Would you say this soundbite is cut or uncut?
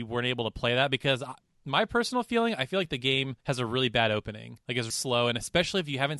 cut